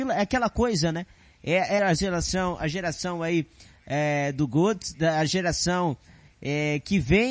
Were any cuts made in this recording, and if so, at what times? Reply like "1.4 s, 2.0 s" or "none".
1.8 s

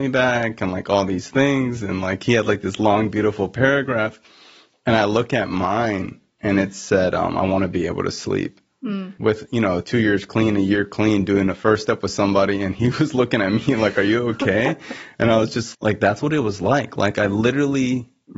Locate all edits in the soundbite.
9.2 s, 15.7 s

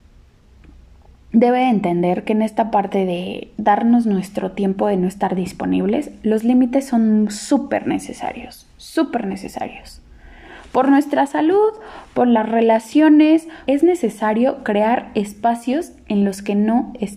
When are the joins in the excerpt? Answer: 13.7 s

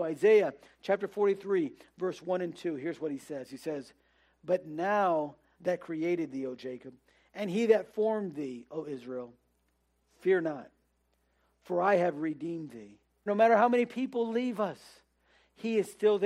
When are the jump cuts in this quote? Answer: 5.5 s, 13.3 s

